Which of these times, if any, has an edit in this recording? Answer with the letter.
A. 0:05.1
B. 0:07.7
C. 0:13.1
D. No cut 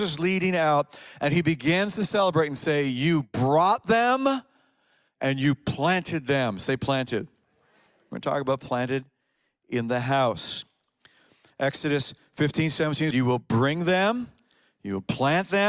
C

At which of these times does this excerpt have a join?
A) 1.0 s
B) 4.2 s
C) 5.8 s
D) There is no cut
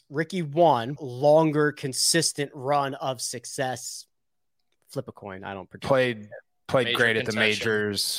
A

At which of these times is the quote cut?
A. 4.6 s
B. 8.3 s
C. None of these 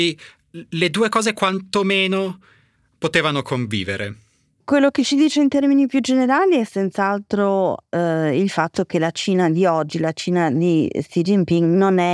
A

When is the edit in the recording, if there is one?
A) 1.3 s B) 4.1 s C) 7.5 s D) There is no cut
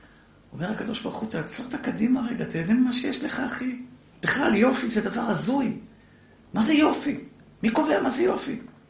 B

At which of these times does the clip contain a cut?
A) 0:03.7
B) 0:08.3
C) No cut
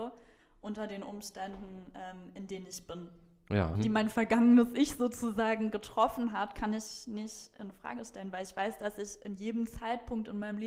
A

